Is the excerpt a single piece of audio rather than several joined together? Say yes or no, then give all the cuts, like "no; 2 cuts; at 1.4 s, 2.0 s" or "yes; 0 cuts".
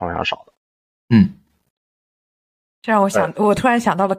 yes; 0 cuts